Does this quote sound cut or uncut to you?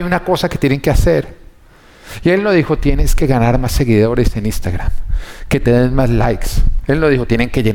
uncut